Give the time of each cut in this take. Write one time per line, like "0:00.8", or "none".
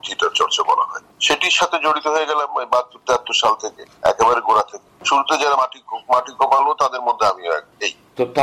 none